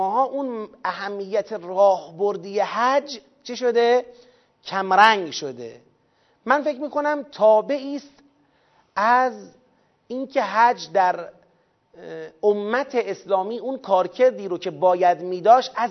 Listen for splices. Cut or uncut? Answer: uncut